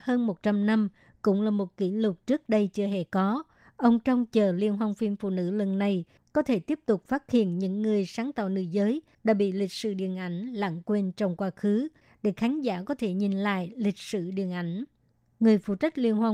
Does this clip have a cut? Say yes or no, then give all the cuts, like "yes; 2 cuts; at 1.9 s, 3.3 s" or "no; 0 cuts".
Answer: no; 0 cuts